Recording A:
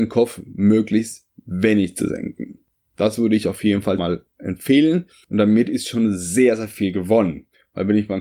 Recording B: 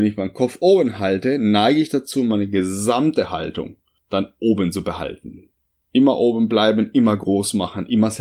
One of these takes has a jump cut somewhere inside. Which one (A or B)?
A